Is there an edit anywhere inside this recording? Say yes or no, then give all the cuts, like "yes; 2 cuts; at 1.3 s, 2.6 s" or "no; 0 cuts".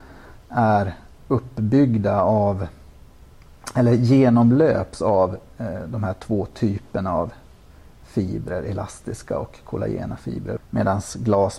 yes; 2 cuts; at 1.2 s, 10.6 s